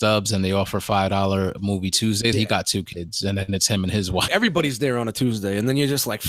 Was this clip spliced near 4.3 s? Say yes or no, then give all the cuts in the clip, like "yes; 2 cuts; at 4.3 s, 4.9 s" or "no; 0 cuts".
yes; 2 cuts; at 2.3 s, 4.3 s